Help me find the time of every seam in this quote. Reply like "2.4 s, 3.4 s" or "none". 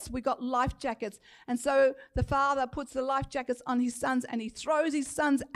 none